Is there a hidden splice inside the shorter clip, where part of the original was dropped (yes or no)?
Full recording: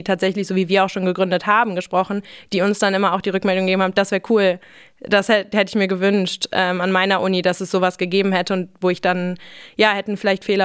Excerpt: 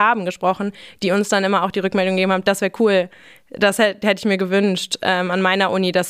no